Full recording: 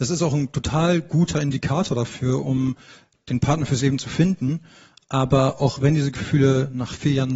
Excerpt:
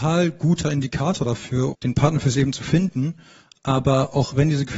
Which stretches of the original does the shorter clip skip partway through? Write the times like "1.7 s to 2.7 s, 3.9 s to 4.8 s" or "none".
2.4 s to 3.2 s